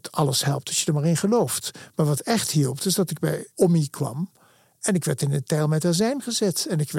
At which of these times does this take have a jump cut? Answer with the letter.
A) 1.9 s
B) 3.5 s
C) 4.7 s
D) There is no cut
B